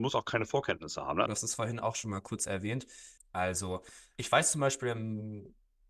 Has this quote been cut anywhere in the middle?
yes; 2 cuts; at 1.3 s, 3.2 s

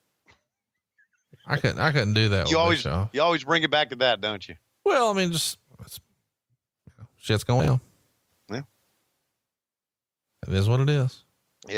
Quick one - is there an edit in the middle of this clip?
no; 0 cuts

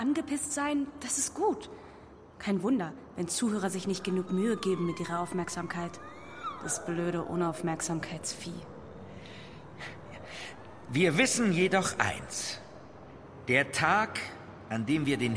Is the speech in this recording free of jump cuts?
yes; 0 cuts

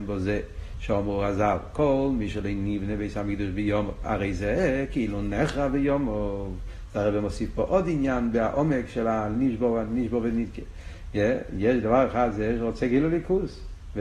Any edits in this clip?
no; 0 cuts

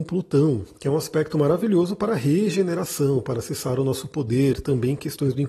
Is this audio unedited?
yes; 0 cuts

